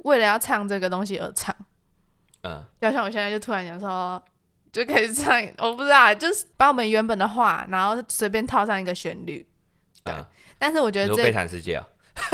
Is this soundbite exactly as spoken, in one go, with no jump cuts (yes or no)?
yes